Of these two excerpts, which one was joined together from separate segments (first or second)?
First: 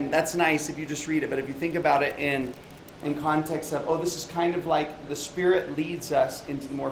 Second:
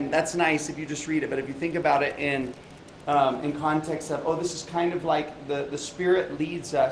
first